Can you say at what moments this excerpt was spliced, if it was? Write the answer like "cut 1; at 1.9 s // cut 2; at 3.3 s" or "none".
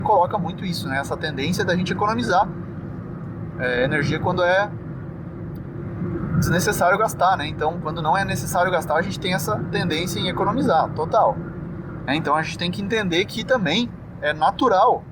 cut 1; at 7.8 s // cut 2; at 12.1 s